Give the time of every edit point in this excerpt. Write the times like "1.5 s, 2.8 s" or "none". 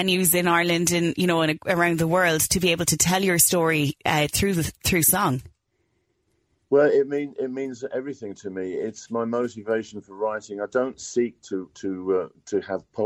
none